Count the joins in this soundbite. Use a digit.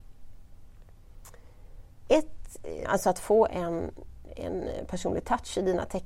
1